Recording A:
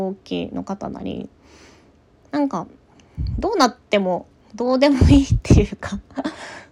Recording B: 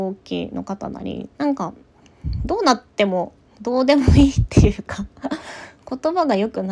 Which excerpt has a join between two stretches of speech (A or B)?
B